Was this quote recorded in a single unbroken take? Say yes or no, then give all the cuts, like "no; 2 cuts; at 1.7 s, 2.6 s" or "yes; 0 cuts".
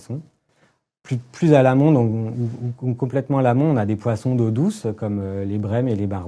yes; 0 cuts